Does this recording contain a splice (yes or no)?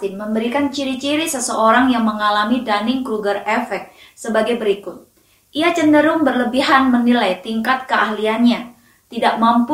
no